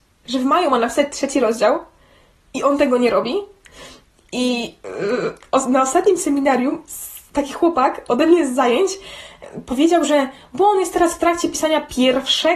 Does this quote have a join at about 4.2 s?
no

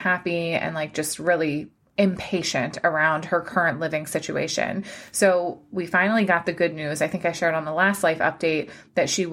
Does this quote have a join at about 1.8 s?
yes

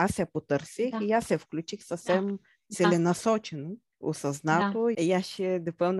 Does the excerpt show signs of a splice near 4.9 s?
yes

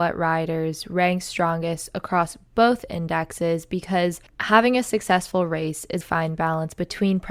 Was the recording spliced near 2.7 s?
no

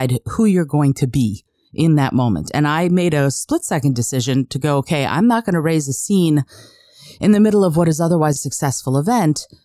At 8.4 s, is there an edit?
yes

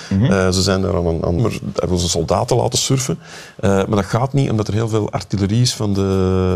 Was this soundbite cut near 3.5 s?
no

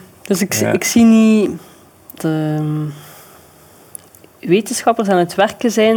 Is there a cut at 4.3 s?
no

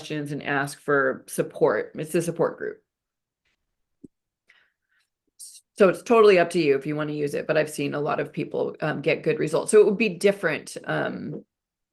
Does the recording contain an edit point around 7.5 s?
no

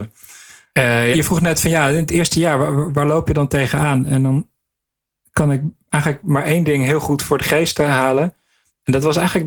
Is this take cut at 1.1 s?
yes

